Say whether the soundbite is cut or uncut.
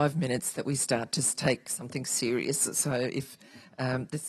uncut